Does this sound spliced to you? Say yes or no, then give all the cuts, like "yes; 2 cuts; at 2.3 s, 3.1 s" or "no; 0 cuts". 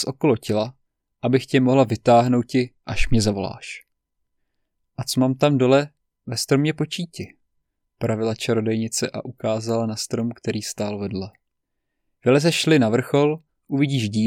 yes; 2 cuts; at 7.8 s, 12.2 s